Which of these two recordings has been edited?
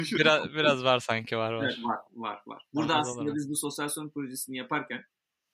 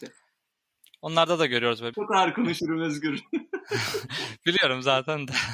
second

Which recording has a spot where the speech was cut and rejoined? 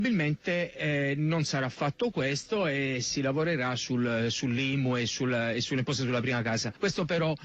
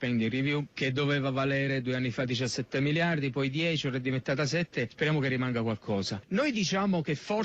second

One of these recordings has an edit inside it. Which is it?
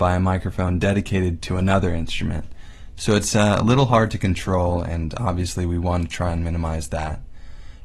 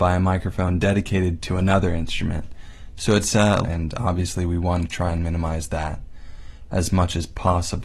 second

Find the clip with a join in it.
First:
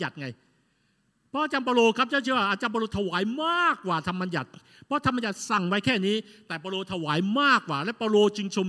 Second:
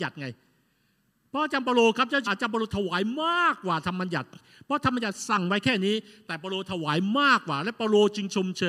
second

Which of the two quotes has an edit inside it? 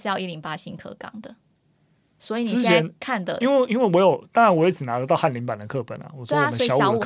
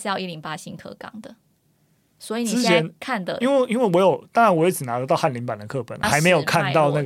second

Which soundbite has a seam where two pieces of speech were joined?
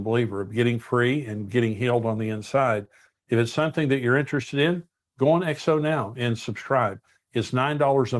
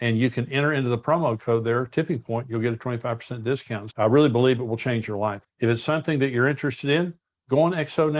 second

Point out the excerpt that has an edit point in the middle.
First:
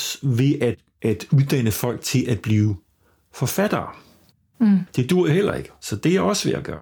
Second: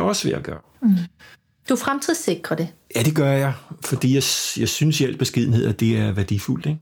first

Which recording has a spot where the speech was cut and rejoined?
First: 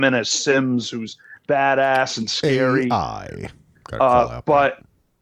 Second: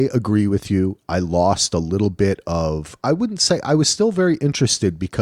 first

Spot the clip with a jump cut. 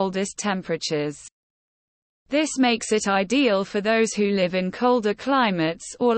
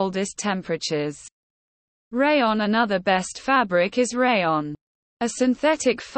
second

